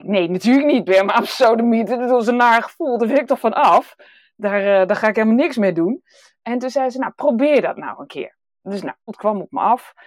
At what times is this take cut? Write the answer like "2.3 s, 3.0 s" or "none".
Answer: 9.1 s